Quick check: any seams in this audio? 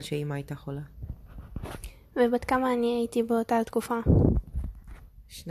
no; 0 cuts

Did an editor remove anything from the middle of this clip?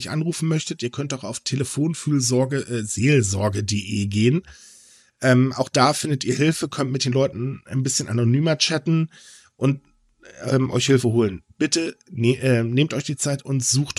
no; 0 cuts

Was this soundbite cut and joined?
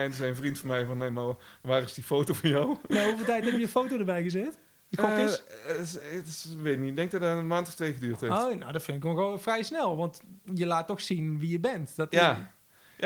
no; 0 cuts

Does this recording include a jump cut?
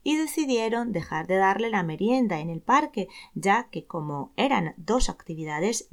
no; 0 cuts

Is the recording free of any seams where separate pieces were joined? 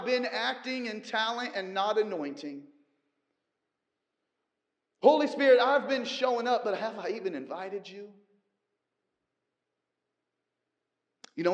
yes; 0 cuts

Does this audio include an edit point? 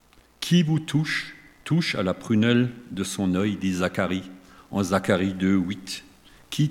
no; 0 cuts

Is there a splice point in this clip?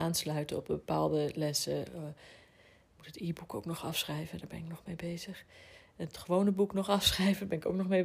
no; 0 cuts

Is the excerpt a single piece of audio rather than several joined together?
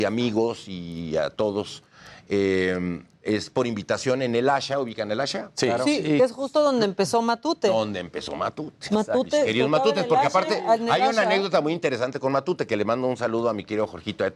yes; 0 cuts

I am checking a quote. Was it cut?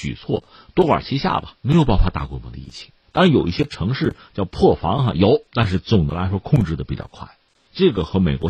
yes; 2 cuts; at 1.6 s, 5.5 s

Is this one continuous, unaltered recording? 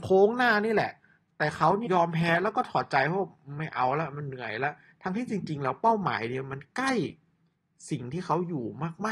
no; 1 cut; at 1.9 s

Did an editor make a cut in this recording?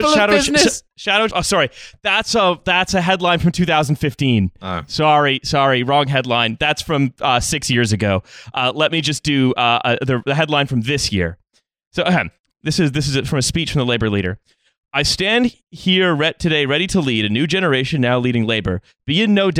yes; 1 cut; at 1.3 s

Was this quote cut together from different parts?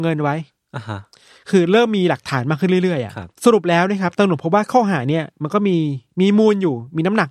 yes; 1 cut; at 3.3 s

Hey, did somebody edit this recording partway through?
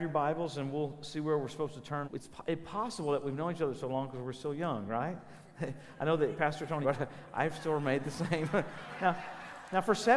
yes; 2 cuts; at 2.0 s, 6.8 s

